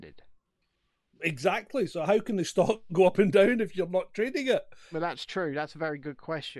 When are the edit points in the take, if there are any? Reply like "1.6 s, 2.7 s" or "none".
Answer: none